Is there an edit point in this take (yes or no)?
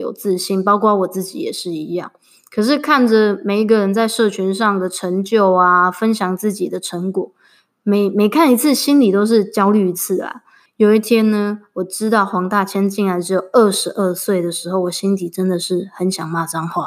yes